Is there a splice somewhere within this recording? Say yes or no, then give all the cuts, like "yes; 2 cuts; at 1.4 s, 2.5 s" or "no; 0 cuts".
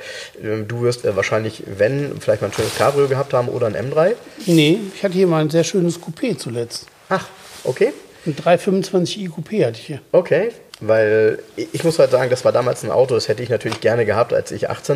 yes; 1 cut; at 1.0 s